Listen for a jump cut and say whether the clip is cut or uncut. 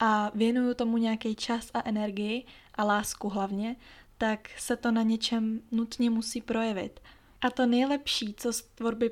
uncut